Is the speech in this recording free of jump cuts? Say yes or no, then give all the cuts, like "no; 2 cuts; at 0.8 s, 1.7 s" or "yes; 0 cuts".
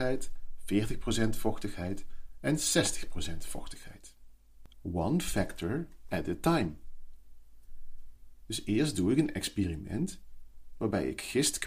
no; 1 cut; at 4.7 s